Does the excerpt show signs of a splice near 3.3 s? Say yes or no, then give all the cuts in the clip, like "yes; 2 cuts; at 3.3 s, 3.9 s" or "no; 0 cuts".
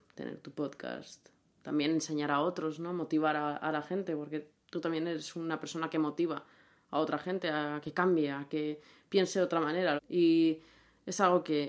no; 1 cut; at 10.0 s